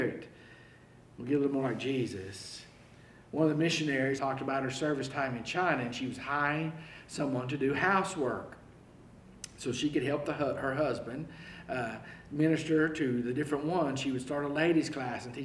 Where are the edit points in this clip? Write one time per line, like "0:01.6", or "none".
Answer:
0:04.2